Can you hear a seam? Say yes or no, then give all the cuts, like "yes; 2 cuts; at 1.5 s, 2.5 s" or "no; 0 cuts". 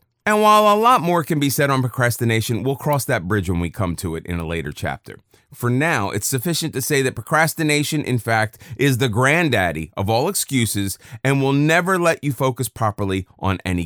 no; 0 cuts